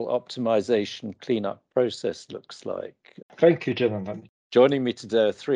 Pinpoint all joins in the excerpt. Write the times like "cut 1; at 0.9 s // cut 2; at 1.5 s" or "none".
cut 1; at 3.2 s // cut 2; at 4.3 s